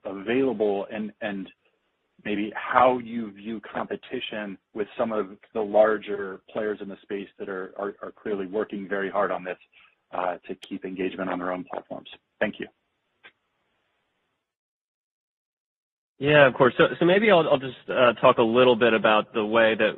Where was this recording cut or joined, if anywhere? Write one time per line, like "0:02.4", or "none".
0:04.7